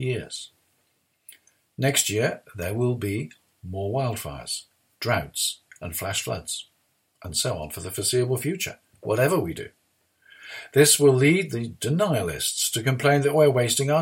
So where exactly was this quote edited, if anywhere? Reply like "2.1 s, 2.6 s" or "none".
none